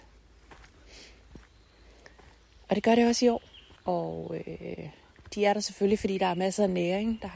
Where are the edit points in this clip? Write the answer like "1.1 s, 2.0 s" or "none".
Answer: 3.8 s